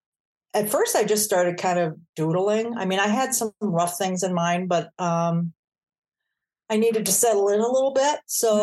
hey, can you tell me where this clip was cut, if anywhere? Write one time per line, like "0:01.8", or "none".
none